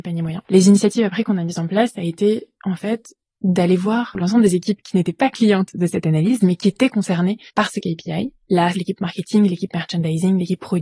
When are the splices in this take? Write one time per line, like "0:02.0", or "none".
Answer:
0:07.5
0:08.7